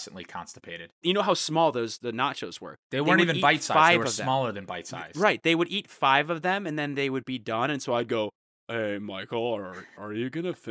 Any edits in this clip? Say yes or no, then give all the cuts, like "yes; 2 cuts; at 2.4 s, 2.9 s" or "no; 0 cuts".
yes; 1 cut; at 1.0 s